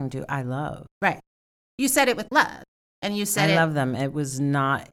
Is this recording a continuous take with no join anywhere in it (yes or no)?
yes